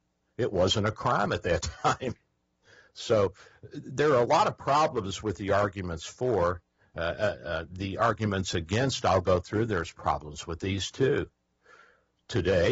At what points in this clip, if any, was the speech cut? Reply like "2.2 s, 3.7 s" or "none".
none

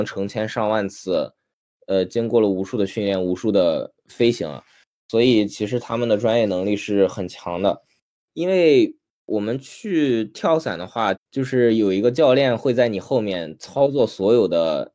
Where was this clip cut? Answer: 8.2 s, 11.1 s

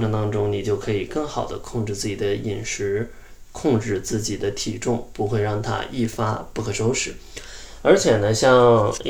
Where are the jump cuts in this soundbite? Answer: none

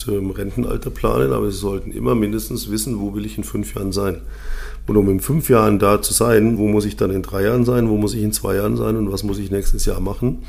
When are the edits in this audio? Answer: 6.6 s

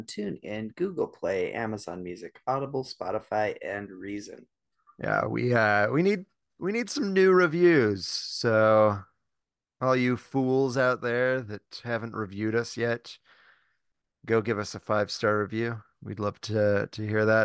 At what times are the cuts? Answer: none

